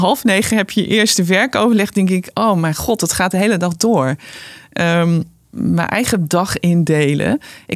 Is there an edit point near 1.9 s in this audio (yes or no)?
no